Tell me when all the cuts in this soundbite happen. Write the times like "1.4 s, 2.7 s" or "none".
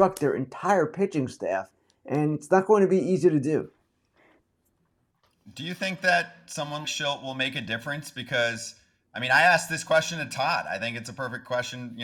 6.8 s